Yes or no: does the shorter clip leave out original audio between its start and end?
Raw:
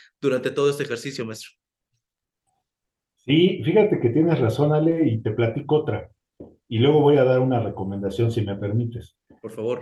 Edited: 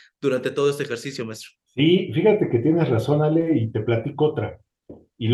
yes